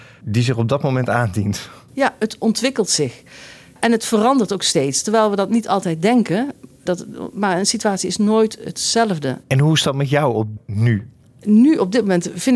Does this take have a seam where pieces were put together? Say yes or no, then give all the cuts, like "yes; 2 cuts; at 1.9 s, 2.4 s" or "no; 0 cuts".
yes; 1 cut; at 9.4 s